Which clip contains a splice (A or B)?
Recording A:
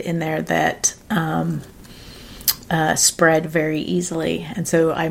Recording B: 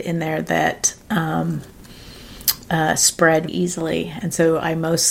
B